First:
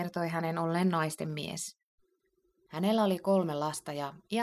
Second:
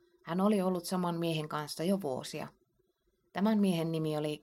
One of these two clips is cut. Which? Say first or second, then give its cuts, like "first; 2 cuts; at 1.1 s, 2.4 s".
first; 1 cut; at 2.7 s